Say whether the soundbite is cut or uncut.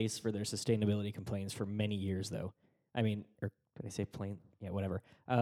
uncut